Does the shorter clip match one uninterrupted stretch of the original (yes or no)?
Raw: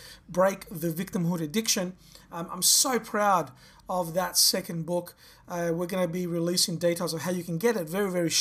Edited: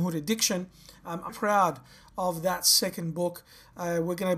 no